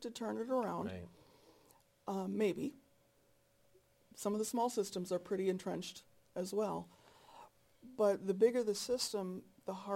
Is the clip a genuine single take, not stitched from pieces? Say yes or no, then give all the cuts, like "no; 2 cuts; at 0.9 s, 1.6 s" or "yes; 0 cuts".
yes; 0 cuts